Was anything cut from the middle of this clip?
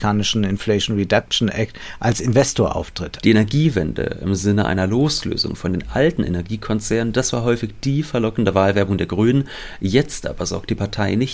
yes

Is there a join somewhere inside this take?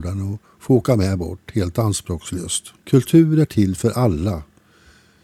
yes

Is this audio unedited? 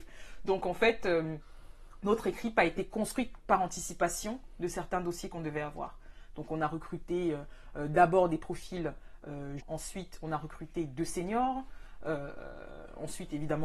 no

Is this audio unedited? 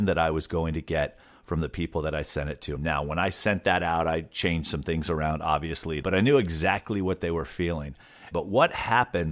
no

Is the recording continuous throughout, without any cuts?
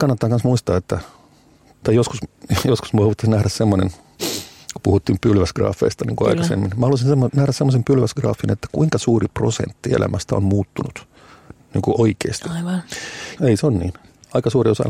no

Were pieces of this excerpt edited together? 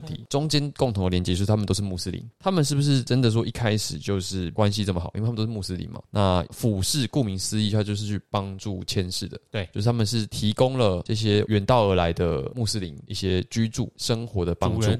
yes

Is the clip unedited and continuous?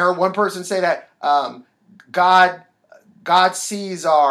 yes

